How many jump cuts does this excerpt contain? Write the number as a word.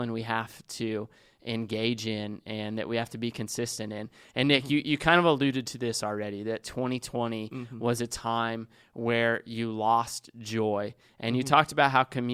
zero